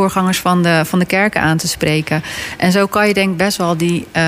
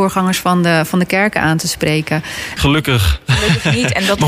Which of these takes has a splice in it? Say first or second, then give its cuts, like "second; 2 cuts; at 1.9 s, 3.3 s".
second; 1 cut; at 2.6 s